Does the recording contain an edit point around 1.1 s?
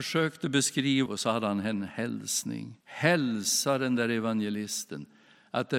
yes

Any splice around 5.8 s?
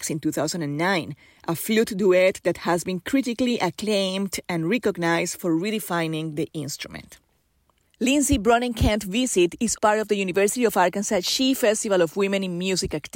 no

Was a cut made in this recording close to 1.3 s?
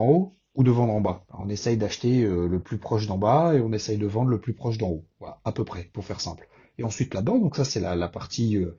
yes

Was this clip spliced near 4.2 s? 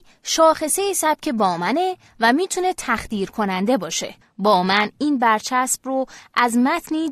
yes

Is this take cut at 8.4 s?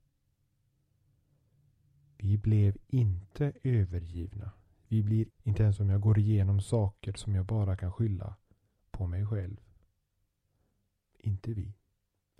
no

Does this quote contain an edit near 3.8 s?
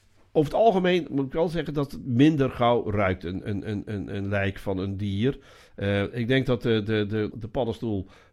no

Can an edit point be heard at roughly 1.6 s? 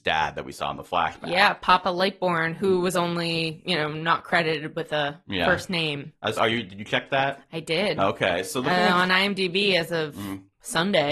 no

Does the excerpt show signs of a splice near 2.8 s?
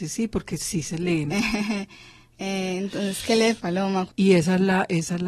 no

